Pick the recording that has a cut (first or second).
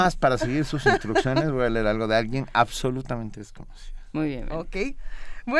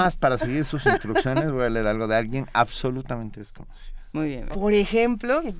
second